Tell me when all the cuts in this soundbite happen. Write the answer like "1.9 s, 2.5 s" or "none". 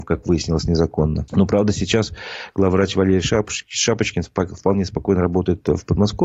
1.3 s